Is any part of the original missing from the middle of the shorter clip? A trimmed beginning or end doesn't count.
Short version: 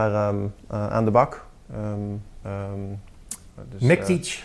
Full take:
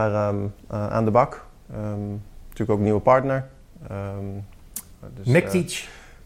yes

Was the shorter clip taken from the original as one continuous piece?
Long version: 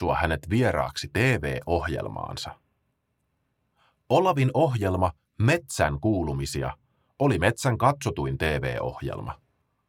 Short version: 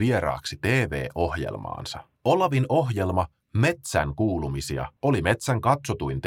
no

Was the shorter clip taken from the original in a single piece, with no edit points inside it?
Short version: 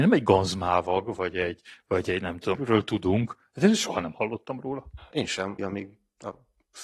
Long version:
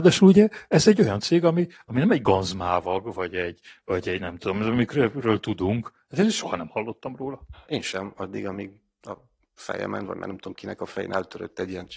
no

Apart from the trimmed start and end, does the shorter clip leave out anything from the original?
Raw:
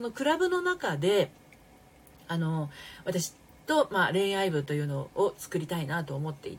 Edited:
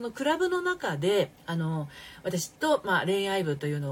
yes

